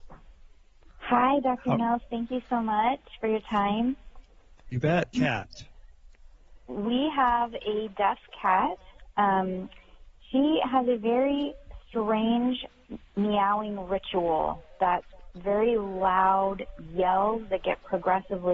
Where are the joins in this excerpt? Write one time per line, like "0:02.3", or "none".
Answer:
0:05.1